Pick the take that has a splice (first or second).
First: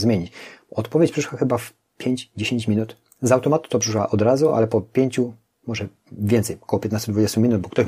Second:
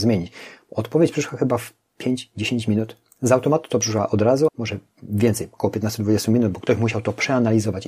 second